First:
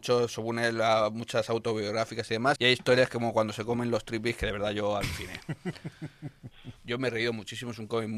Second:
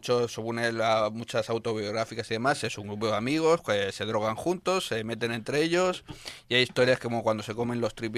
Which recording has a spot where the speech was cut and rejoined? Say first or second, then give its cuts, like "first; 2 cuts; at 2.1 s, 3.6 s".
first; 2 cuts; at 2.6 s, 6.8 s